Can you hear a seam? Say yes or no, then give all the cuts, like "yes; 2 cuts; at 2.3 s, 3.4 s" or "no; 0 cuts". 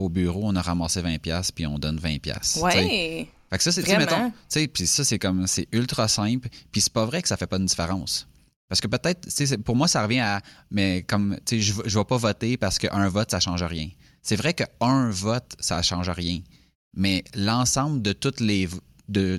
no; 0 cuts